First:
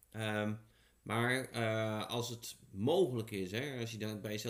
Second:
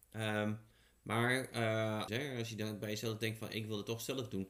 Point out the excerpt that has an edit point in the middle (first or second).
second